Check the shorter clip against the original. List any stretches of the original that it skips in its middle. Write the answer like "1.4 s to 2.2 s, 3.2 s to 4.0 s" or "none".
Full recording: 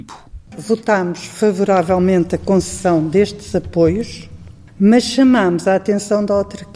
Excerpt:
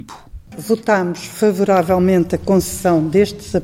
none